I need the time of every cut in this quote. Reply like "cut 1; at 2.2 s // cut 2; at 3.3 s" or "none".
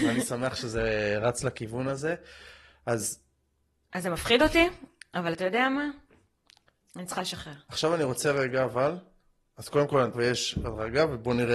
cut 1; at 10.1 s